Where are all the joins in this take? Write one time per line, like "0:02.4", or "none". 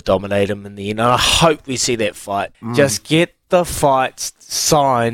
0:02.5